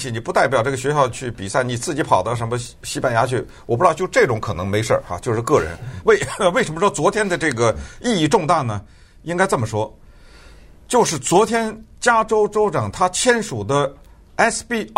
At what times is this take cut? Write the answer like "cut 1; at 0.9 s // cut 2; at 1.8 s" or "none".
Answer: cut 1; at 6.0 s